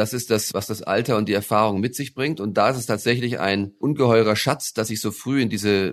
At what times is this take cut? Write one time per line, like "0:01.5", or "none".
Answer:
none